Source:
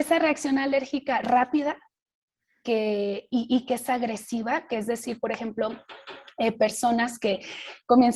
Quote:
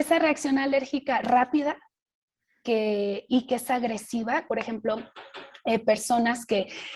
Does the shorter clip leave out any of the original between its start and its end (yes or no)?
yes